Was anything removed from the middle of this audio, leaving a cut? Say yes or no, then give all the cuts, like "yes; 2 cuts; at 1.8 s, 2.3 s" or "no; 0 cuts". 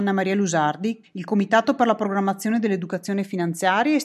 yes; 1 cut; at 1.0 s